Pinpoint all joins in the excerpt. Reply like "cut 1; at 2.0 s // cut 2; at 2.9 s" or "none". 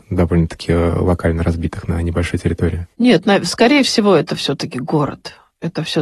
none